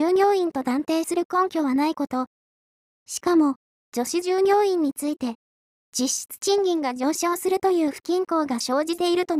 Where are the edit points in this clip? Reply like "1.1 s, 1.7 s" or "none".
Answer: 5.9 s